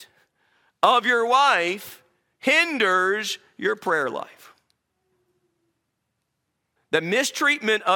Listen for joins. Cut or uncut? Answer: cut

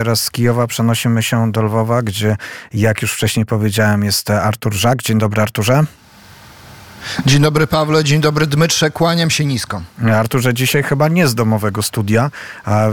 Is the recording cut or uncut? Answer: uncut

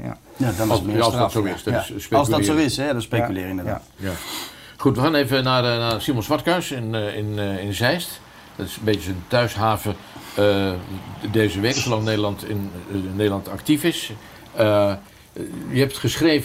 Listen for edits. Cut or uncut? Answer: uncut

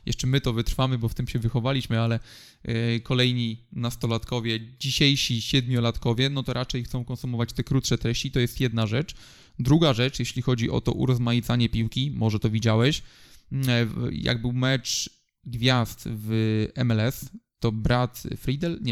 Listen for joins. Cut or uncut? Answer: uncut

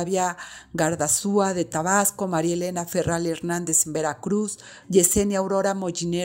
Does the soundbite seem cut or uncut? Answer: cut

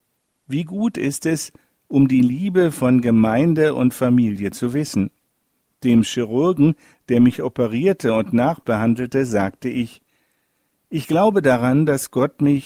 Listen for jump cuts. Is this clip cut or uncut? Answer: uncut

